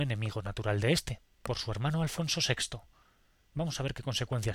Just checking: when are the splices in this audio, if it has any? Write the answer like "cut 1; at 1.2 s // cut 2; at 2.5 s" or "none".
none